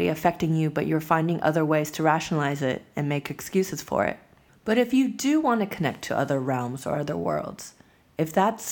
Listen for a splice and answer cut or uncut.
cut